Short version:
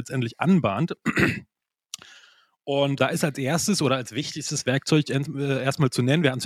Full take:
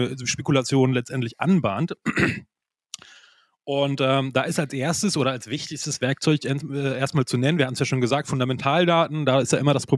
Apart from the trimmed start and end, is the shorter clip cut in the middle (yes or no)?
yes